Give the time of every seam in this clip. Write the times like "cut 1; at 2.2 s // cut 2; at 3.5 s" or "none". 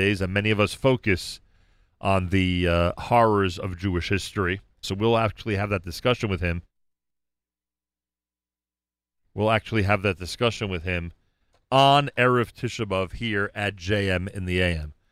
cut 1; at 4.8 s